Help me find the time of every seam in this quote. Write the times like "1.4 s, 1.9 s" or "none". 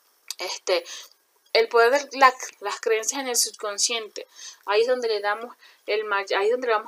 2.5 s